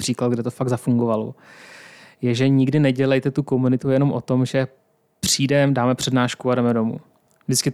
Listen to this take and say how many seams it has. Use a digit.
0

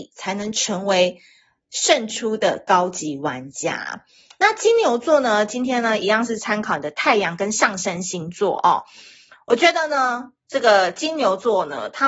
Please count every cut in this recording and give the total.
0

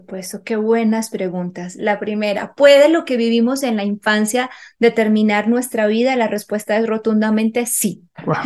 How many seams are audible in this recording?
0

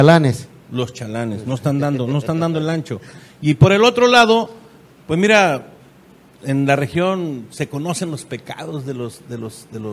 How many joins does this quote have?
1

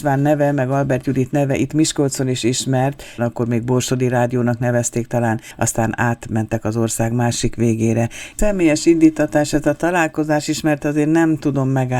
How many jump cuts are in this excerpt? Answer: 2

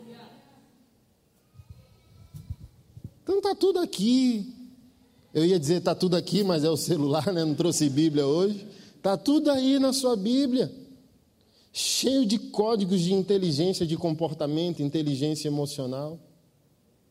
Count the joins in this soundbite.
0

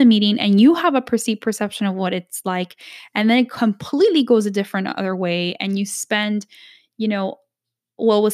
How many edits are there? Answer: 0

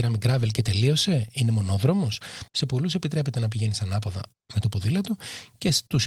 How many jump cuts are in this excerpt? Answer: 1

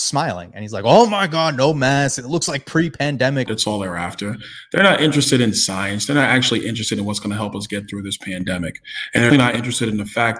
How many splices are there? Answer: 2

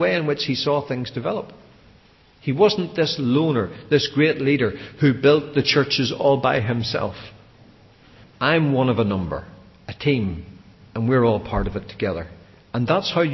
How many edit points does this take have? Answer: 1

